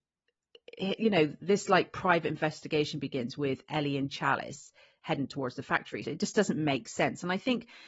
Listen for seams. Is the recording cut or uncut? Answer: cut